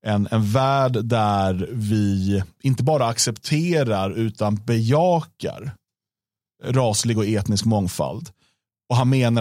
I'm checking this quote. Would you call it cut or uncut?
uncut